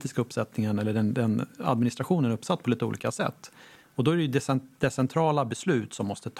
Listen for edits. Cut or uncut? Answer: cut